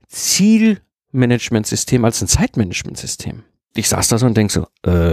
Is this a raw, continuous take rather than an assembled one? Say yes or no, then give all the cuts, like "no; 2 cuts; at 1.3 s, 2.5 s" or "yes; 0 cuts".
no; 1 cut; at 3.7 s